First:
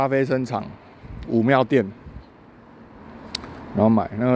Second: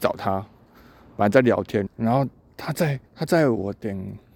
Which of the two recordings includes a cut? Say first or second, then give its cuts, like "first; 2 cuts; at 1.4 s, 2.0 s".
second; 2 cuts; at 1.9 s, 3.1 s